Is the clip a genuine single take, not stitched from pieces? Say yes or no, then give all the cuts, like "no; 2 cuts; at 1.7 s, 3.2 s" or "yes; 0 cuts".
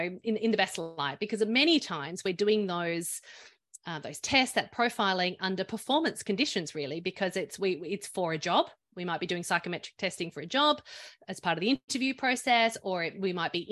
yes; 0 cuts